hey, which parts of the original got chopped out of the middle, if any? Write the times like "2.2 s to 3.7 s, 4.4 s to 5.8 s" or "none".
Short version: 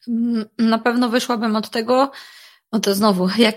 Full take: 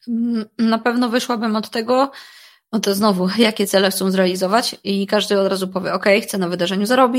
none